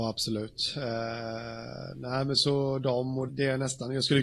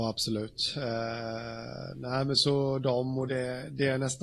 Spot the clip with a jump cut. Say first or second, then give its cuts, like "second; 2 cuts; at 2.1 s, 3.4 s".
first; 1 cut; at 3.3 s